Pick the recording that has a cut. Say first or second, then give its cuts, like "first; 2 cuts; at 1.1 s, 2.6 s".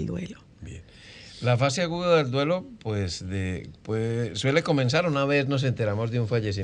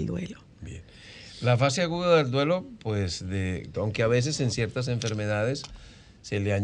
second; 1 cut; at 3.7 s